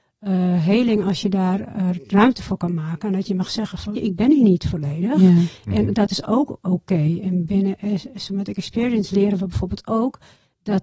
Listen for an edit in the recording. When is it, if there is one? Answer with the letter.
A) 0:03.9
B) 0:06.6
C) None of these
A